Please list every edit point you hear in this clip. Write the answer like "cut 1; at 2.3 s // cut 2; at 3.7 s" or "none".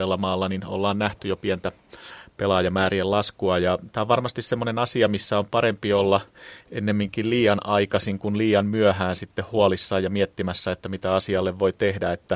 none